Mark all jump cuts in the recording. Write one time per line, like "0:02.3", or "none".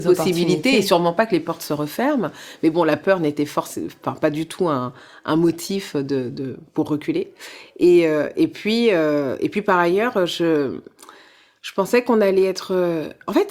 none